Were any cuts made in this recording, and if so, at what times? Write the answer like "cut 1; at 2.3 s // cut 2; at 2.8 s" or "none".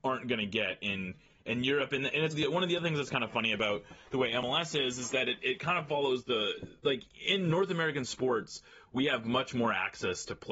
cut 1; at 2.3 s // cut 2; at 6.8 s